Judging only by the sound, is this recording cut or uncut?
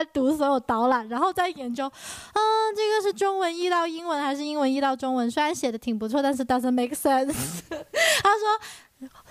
uncut